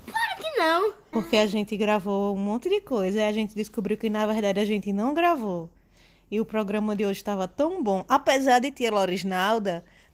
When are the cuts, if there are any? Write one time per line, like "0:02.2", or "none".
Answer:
0:01.1

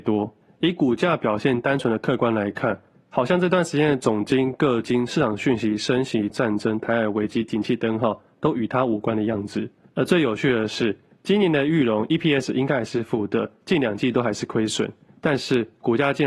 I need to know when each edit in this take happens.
0:06.3

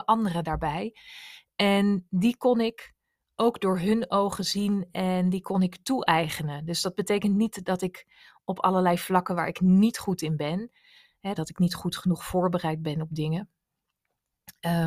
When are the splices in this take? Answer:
0:11.4

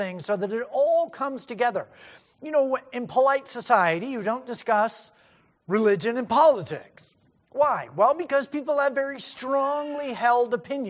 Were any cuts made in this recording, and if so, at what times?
none

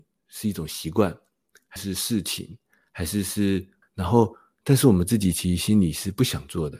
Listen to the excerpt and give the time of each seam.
0:01.8
0:03.8

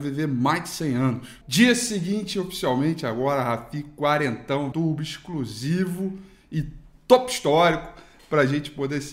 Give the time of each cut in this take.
0:01.4
0:04.7

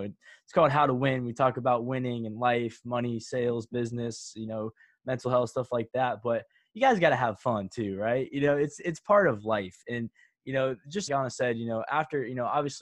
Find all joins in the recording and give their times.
0:11.1

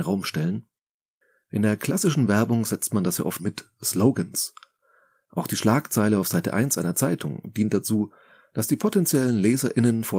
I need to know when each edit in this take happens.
0:03.4

